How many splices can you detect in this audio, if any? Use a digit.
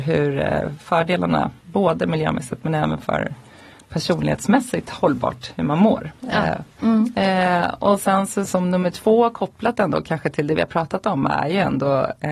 2